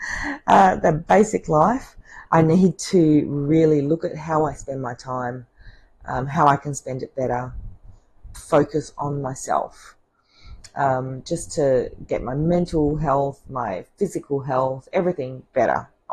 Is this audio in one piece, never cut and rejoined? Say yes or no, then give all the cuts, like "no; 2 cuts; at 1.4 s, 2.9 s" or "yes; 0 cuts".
no; 2 cuts; at 2.3 s, 8.3 s